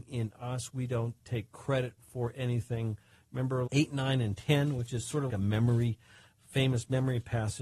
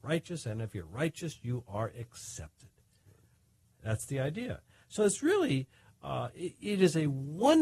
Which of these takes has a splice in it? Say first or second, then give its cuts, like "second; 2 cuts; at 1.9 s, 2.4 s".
first; 2 cuts; at 3.7 s, 5.3 s